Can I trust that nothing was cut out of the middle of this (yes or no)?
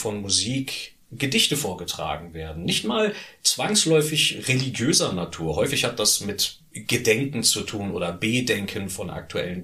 yes